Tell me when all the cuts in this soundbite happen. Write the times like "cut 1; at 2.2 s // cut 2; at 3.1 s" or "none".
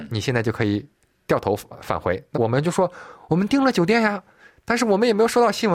cut 1; at 2.3 s